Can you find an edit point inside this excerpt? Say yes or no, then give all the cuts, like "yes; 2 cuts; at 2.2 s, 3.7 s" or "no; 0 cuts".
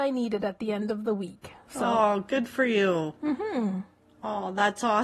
no; 0 cuts